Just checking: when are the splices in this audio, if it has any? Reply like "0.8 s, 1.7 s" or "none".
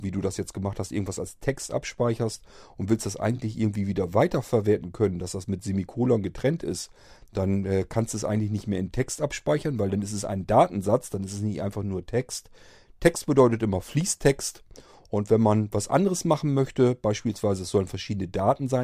7.2 s

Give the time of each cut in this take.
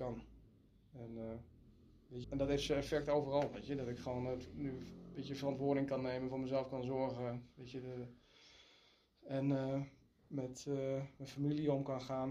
2.2 s

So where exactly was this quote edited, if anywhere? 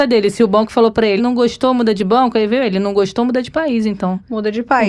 1.2 s

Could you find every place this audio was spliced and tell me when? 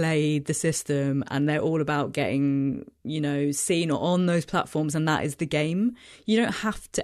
none

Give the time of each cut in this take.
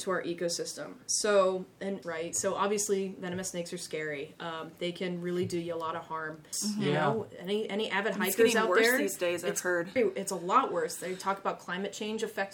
2.0 s, 6.5 s, 10.0 s

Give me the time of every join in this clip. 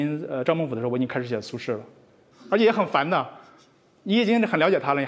2.3 s

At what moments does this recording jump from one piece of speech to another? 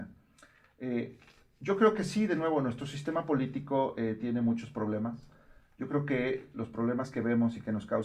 none

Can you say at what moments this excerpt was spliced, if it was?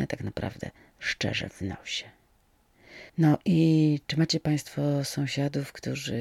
3.1 s

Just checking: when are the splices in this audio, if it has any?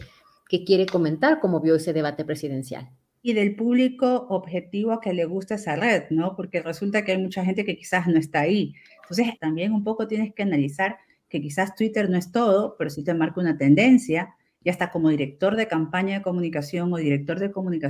9.4 s

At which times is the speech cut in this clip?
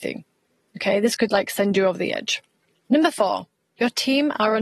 none

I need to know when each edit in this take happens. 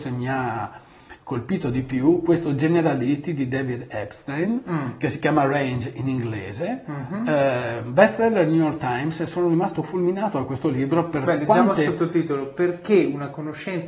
none

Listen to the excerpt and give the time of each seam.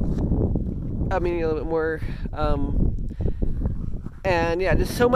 none

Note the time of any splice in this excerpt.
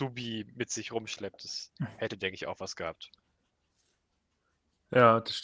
none

